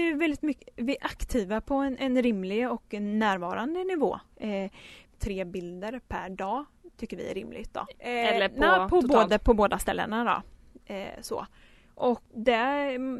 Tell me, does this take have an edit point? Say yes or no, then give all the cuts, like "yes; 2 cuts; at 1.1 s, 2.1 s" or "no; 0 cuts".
yes; 2 cuts; at 5.1 s, 7.9 s